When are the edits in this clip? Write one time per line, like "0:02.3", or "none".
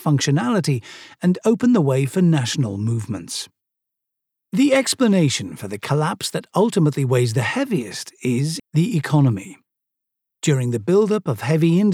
0:08.6